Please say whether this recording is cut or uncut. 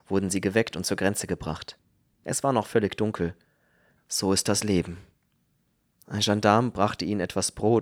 cut